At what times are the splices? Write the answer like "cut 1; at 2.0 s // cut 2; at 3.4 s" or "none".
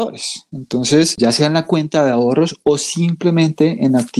cut 1; at 1.2 s